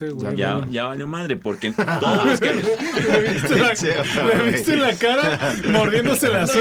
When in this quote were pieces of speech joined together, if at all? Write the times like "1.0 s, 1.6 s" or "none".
none